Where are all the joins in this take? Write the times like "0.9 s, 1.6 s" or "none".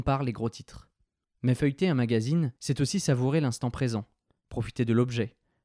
1.2 s, 2.6 s